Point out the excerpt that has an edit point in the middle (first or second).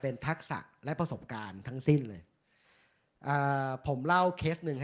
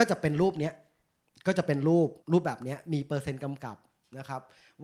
second